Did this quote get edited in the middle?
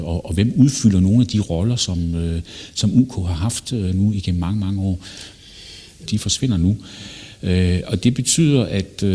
yes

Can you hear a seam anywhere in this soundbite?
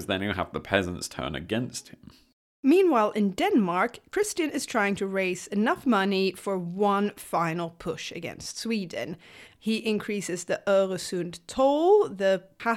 yes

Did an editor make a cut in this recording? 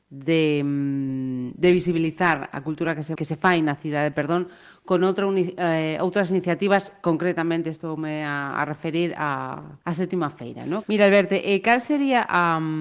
yes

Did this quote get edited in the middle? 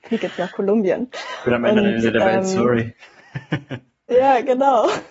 no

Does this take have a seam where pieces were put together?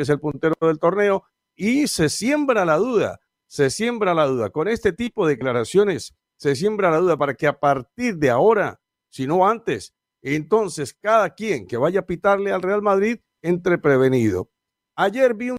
yes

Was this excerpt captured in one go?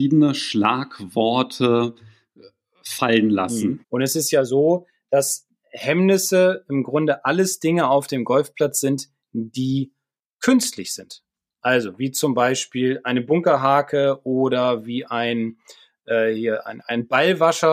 no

